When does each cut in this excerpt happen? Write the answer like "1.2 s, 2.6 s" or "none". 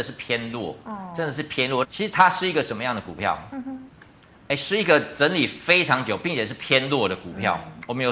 1.8 s